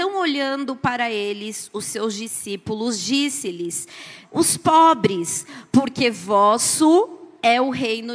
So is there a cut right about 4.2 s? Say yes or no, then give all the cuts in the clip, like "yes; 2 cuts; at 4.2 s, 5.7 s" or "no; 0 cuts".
yes; 1 cut; at 4.2 s